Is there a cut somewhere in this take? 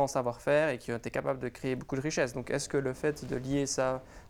no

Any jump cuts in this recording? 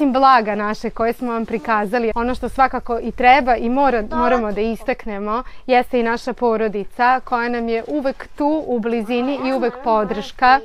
yes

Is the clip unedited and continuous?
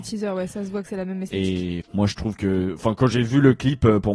no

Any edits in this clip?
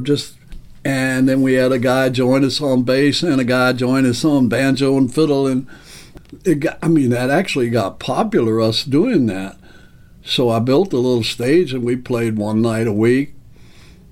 no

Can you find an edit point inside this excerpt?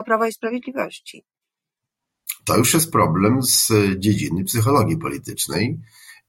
no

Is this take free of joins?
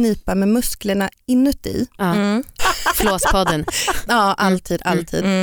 no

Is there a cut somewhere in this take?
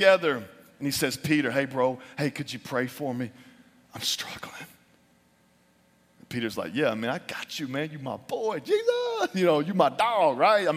no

